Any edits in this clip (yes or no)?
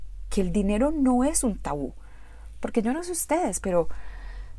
no